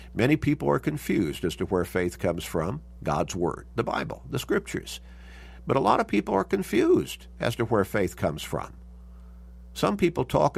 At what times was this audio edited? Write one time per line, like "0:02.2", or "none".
0:03.0